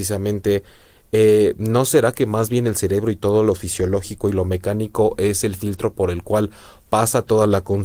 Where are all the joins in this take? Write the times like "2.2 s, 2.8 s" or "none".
none

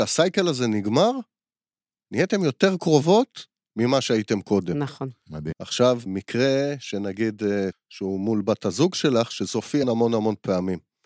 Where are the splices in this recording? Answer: 5.5 s, 7.7 s, 9.8 s

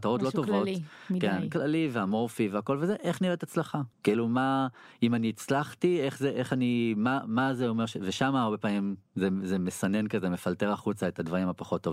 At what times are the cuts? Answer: 3.9 s

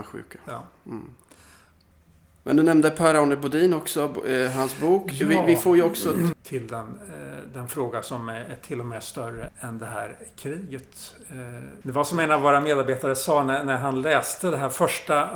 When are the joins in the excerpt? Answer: 6.3 s, 9.5 s, 11.8 s

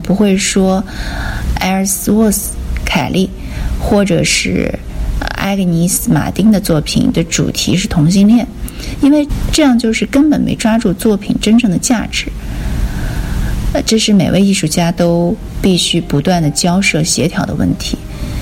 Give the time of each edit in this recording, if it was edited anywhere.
none

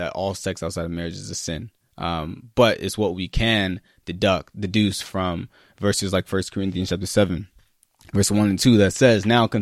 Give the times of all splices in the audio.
none

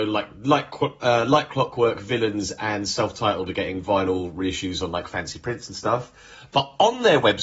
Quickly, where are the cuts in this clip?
none

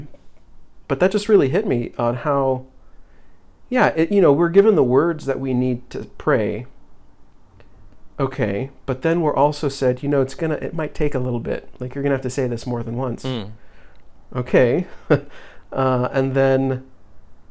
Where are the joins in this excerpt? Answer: none

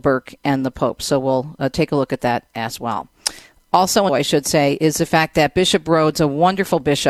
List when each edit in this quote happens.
4.1 s

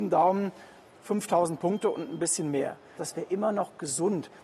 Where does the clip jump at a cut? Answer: 3.0 s

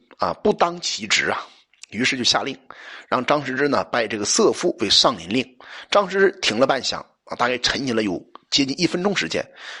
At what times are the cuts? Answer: none

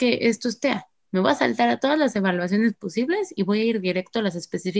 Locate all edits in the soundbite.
none

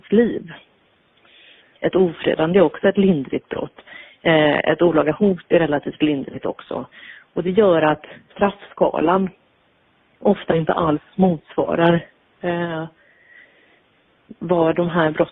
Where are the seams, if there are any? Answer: 1.8 s, 8.3 s

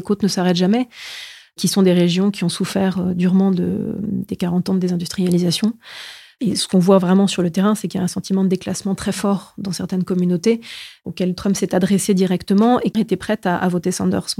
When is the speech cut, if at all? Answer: 9.0 s, 12.9 s

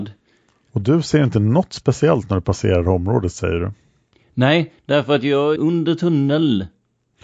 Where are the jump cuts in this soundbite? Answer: 5.6 s

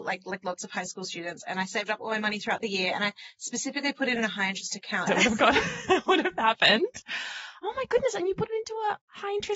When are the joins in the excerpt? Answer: 5.1 s

